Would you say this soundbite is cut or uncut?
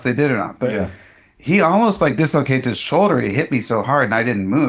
uncut